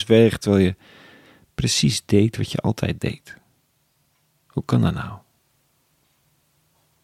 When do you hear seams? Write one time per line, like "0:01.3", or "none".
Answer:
none